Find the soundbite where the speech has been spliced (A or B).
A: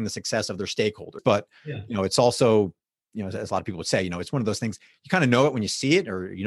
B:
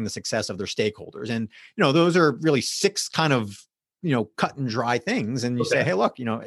A